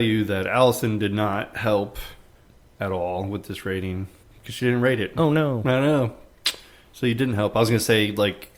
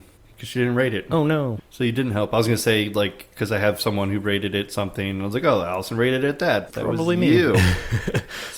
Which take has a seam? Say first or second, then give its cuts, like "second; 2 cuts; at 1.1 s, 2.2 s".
second; 2 cuts; at 1.6 s, 6.7 s